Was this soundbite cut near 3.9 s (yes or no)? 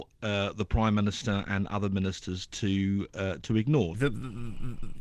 yes